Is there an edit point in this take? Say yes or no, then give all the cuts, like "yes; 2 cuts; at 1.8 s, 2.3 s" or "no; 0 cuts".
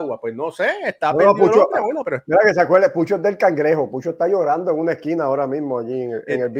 no; 0 cuts